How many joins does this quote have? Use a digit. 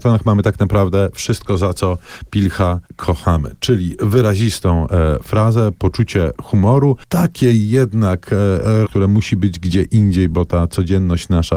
2